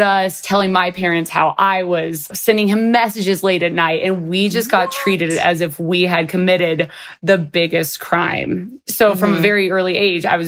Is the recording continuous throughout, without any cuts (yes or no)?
yes